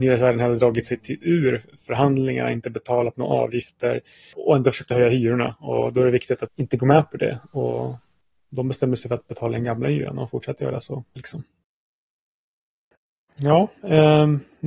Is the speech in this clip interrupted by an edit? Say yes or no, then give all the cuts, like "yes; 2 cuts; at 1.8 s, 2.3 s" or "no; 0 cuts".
yes; 3 cuts; at 4.3 s, 6.5 s, 11.2 s